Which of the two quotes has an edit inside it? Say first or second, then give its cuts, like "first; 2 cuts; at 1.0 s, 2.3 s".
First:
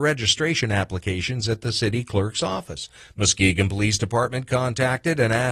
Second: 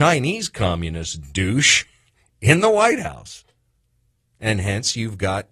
second; 1 cut; at 4.3 s